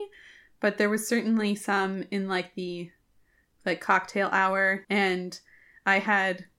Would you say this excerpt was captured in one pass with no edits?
no; 1 cut; at 4.8 s

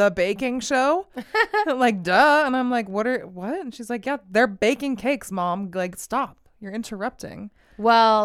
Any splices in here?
no; 0 cuts

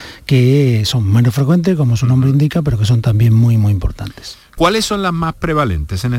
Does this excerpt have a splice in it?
yes; 1 cut; at 4.6 s

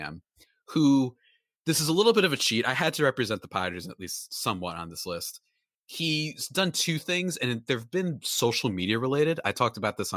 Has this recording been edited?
no; 0 cuts

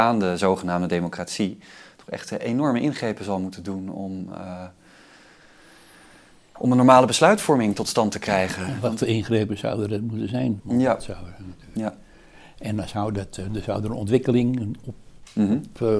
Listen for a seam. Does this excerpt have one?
yes; 1 cut; at 10.6 s

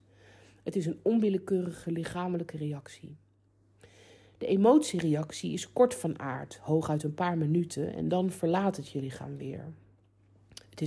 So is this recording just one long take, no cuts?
yes; 0 cuts

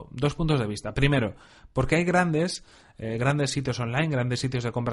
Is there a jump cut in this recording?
no; 0 cuts

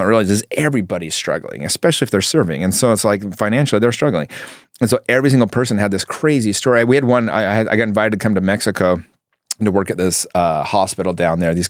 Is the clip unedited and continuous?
yes; 0 cuts

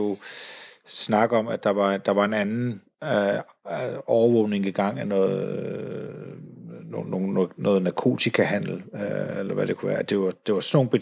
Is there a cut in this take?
no; 0 cuts

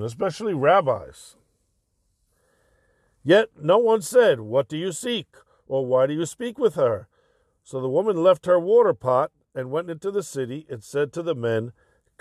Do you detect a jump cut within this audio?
no; 0 cuts

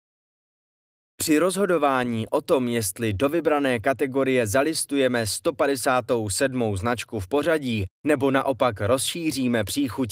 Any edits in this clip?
no; 0 cuts

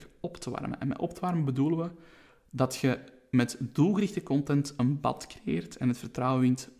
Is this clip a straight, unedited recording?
yes; 0 cuts

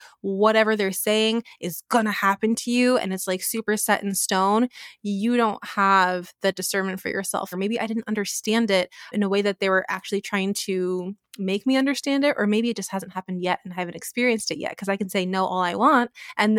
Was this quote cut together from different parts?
yes; 2 cuts; at 7.5 s, 9.1 s

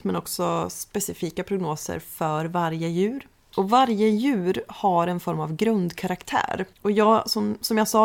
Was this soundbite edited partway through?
yes; 1 cut; at 6.7 s

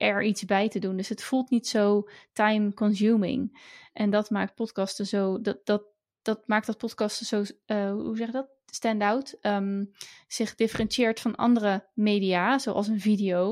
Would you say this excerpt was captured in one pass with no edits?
yes; 0 cuts

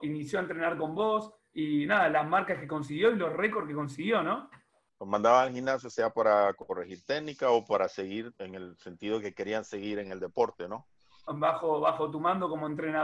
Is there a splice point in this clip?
yes; 3 cuts; at 4.9 s, 8.3 s, 11.3 s

